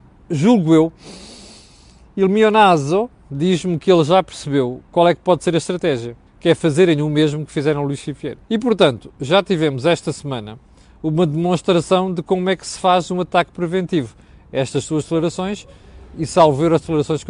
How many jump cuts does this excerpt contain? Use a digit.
2